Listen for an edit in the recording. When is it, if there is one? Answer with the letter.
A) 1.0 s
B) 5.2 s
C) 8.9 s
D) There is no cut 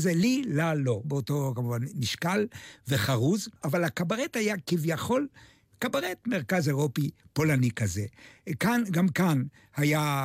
A